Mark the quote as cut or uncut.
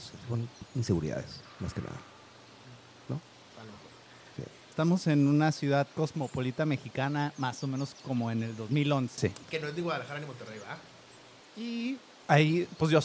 uncut